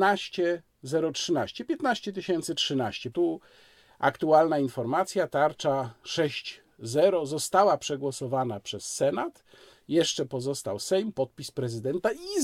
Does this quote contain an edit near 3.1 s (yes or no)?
yes